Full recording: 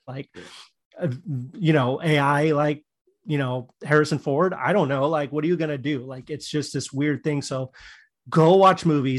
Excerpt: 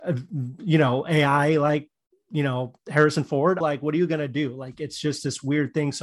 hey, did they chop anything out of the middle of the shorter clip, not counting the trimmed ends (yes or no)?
yes